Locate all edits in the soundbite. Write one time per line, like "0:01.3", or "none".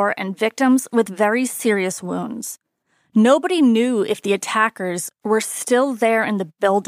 none